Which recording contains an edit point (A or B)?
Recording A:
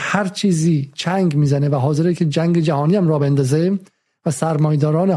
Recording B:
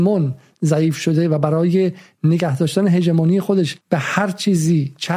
B